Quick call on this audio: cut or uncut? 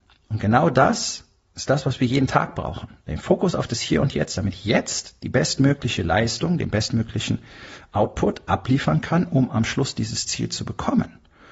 uncut